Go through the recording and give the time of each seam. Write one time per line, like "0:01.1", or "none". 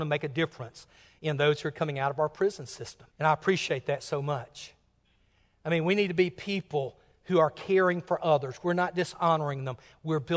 0:03.1